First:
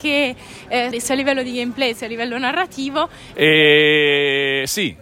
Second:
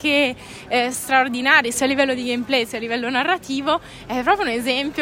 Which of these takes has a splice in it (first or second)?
first